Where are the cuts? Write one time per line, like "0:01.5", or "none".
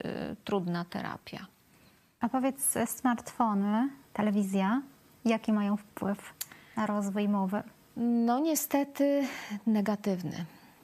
none